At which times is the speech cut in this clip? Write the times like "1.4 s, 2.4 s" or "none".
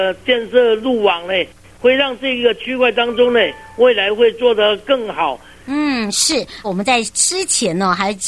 5.6 s, 6.6 s